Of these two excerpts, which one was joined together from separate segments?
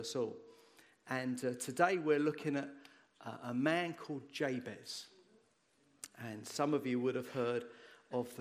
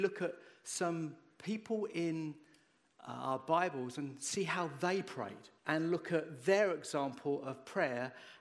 second; 1 cut; at 5.6 s

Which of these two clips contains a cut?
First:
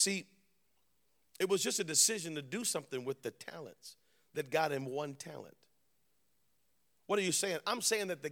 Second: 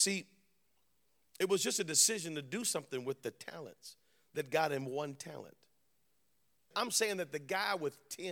second; 1 cut; at 6.7 s

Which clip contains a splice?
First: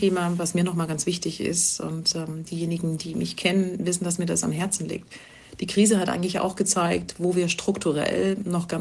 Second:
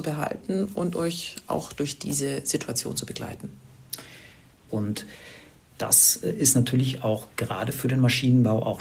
second; 1 cut; at 4.7 s

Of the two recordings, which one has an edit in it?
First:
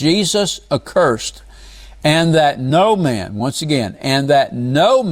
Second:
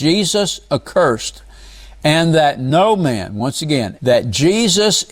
second; 1 cut; at 4.0 s

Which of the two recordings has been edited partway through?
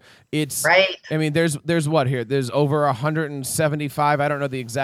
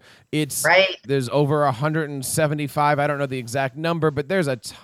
second; 1 cut; at 1.0 s

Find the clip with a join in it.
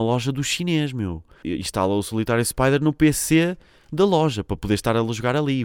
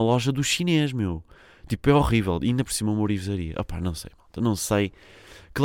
first; 1 cut; at 1.4 s

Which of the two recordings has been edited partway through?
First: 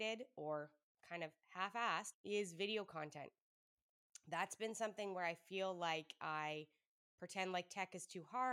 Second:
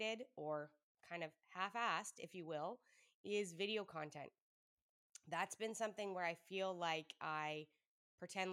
first; 1 cut; at 2.1 s

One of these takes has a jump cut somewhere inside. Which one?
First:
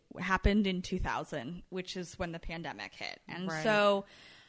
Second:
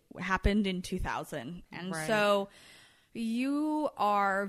second; 1 cut; at 1.7 s

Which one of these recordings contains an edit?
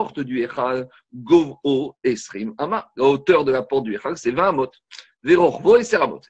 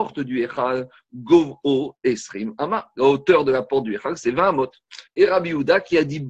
second; 1 cut; at 5.1 s

